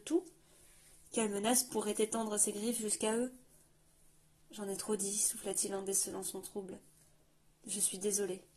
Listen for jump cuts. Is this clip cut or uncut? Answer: uncut